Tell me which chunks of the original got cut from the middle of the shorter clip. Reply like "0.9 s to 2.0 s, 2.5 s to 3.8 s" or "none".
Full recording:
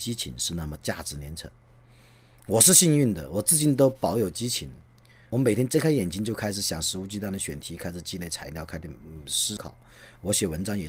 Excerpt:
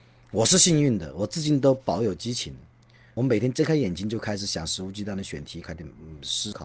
7.8 s to 8.7 s